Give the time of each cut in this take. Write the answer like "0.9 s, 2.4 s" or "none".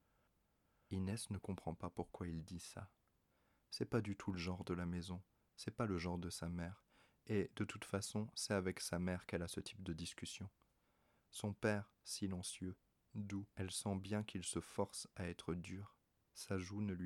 12.0 s, 13.5 s